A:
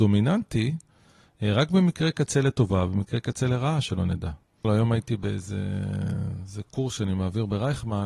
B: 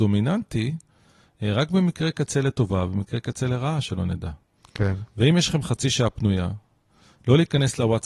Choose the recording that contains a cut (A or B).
A